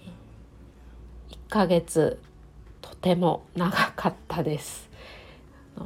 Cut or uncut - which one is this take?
cut